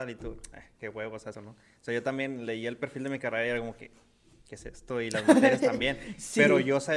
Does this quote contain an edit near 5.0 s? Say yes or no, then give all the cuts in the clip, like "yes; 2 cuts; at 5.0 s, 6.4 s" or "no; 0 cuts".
no; 1 cut; at 1.3 s